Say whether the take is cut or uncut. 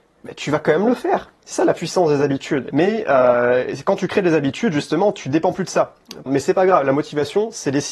cut